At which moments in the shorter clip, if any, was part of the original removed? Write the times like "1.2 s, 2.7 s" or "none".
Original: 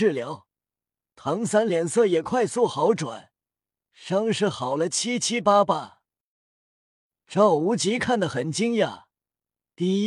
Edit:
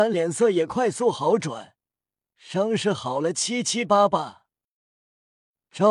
none